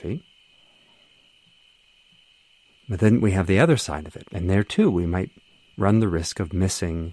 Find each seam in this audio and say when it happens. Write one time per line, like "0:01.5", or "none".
0:04.3